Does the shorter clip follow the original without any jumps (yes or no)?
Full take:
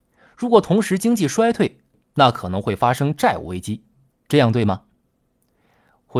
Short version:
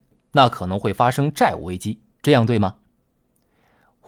no